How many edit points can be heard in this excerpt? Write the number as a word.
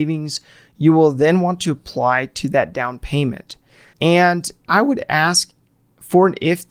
one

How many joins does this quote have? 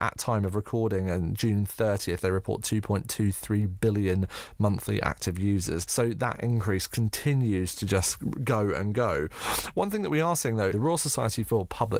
two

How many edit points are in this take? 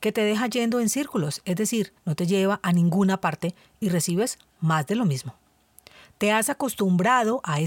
one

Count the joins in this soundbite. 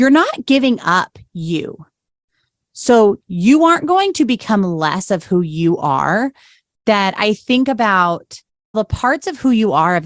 one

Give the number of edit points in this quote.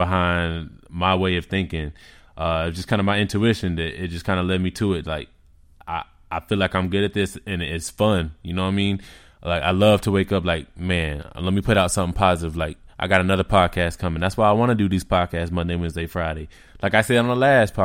zero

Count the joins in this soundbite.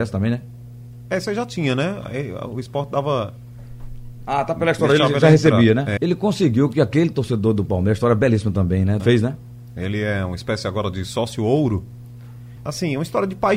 three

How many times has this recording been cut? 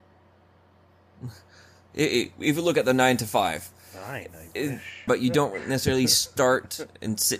one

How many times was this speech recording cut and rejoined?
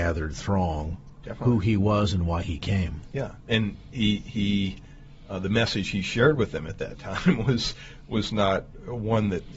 zero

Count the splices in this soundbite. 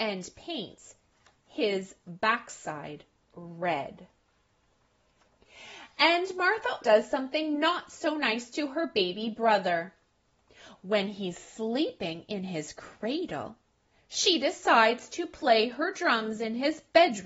one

